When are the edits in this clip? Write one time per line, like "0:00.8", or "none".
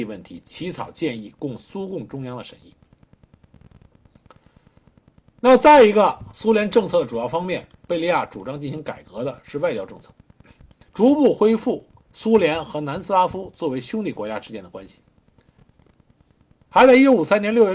0:10.9